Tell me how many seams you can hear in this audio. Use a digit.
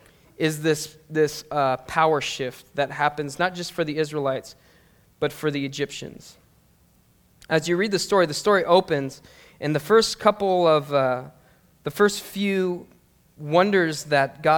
0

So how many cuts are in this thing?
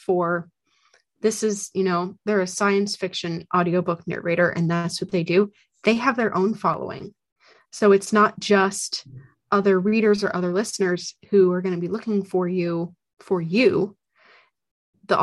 0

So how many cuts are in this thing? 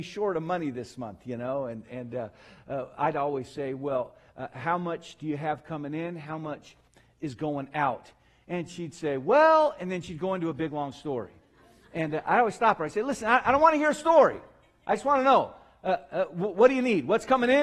0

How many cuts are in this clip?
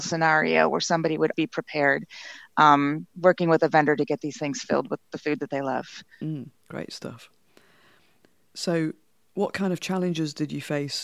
1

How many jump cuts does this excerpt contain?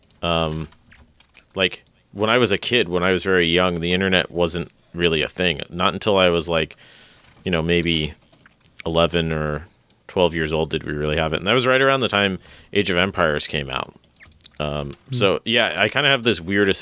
0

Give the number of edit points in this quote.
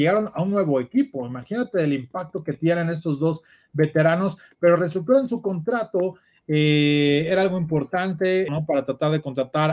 1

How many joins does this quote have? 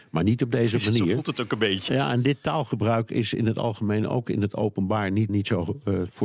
2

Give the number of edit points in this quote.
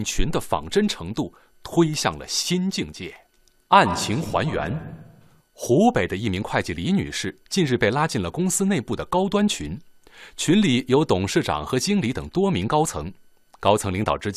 0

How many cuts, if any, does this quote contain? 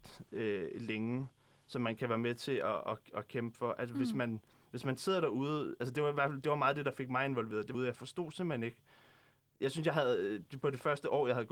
1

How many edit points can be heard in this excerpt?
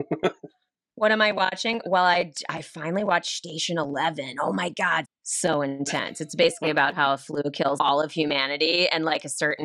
2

